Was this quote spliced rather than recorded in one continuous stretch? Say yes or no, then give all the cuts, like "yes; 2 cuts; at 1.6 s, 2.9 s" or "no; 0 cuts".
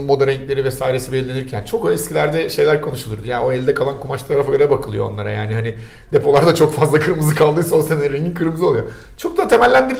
no; 0 cuts